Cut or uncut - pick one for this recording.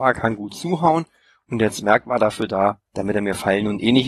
uncut